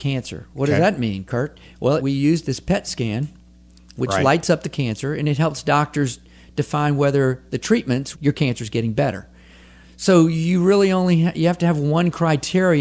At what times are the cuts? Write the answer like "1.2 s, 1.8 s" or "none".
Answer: 2.0 s, 8.1 s